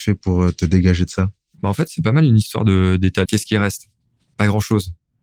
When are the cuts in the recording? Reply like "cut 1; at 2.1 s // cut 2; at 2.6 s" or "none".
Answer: cut 1; at 3.2 s